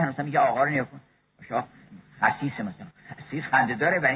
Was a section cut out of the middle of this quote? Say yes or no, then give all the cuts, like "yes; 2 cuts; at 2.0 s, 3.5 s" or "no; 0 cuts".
yes; 1 cut; at 2.9 s